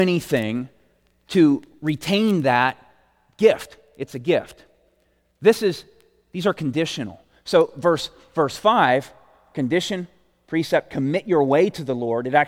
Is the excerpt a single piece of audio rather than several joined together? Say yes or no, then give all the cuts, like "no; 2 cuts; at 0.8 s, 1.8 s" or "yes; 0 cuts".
yes; 0 cuts